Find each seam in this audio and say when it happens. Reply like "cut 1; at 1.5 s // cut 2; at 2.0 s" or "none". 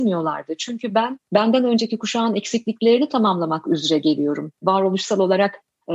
none